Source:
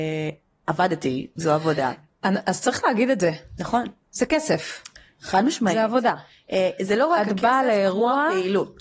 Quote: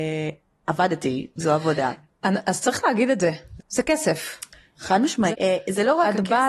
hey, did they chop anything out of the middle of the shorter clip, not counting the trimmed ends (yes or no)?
yes